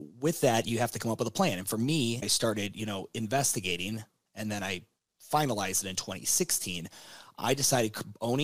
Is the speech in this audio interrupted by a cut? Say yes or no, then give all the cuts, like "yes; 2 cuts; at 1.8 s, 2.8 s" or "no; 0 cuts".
yes; 1 cut; at 2.2 s